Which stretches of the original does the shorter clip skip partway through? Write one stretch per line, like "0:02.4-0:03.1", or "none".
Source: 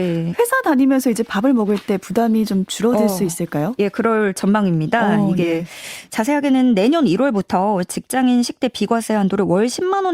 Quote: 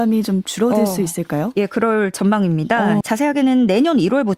0:05.2-0:06.1